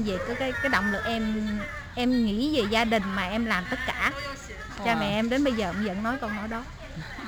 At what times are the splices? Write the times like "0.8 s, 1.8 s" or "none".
none